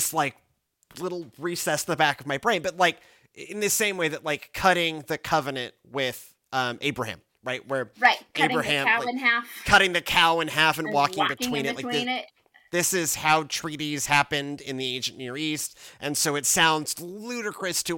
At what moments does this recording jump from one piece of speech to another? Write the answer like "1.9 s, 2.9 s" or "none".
none